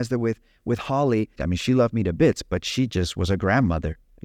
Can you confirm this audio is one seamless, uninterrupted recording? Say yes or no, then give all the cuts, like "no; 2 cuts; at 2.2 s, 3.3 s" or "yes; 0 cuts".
no; 1 cut; at 1.4 s